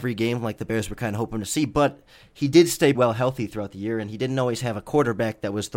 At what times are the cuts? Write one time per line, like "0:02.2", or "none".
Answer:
0:02.9